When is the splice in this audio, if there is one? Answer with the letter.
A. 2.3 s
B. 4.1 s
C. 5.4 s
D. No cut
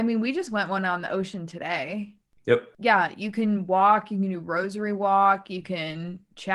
D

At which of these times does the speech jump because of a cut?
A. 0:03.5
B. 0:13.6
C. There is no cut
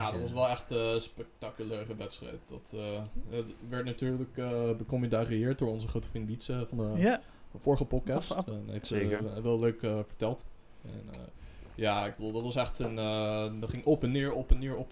C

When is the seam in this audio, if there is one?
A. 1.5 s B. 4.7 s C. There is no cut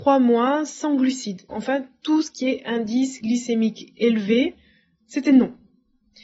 A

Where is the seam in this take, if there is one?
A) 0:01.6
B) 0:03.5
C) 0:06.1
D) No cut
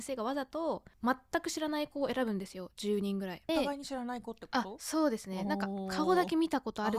B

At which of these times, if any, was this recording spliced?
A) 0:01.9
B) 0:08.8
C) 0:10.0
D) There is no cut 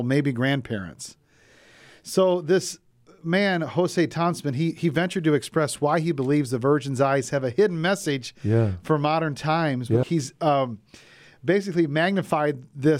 C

